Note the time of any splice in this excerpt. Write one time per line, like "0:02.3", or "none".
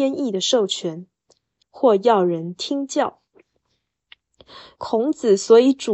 0:01.6
0:04.8